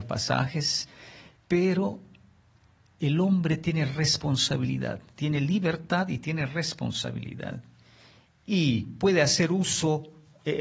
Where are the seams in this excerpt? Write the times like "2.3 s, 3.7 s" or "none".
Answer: 1.4 s